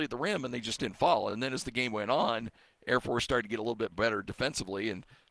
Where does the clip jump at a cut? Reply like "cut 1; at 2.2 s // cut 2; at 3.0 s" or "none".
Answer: none